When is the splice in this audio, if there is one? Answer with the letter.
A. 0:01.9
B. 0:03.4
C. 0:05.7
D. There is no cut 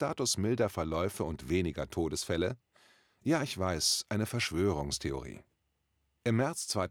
D